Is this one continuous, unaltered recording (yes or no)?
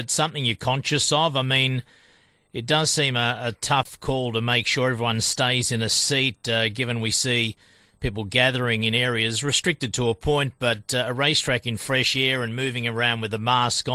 yes